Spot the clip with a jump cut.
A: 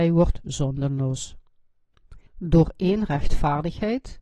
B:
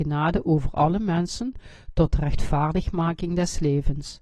A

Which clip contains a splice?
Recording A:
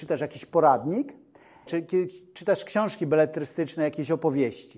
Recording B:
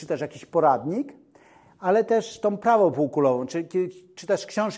A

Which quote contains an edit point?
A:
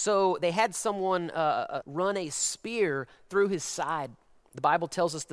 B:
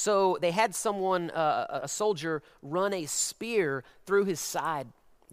A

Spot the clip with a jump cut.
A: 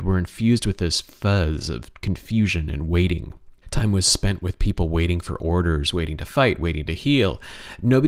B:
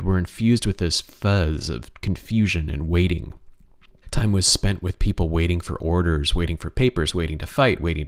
A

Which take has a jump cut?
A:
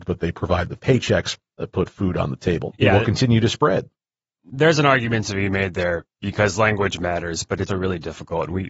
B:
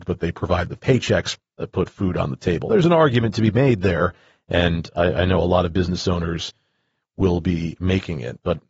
A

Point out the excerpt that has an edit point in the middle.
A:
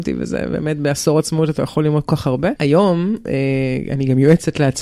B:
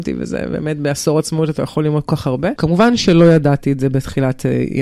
B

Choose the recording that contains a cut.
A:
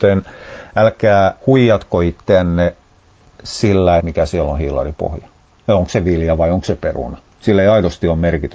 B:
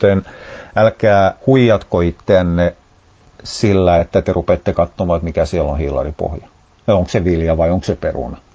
A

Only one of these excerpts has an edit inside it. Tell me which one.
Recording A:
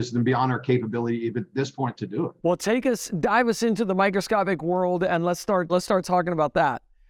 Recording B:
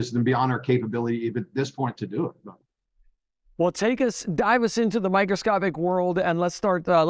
A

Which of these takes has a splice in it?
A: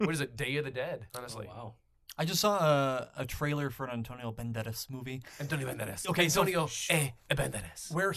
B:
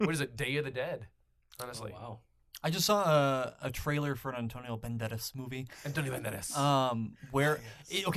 A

